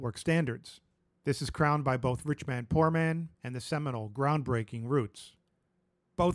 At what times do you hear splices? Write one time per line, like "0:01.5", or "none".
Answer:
0:01.1
0:03.3